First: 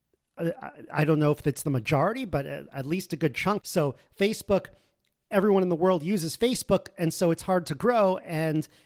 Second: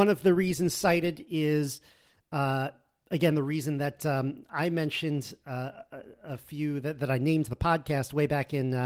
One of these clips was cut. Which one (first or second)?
first